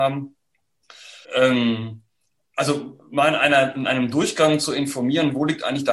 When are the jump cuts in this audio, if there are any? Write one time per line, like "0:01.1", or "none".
0:01.2